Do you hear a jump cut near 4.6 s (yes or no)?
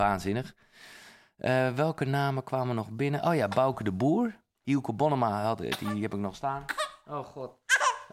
yes